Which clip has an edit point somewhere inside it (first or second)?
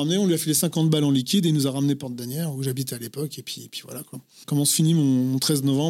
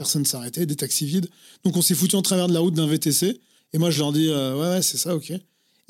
second